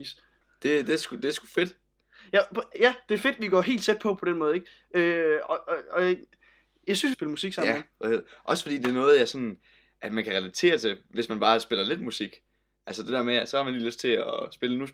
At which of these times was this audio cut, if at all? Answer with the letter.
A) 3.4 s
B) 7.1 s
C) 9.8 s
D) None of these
B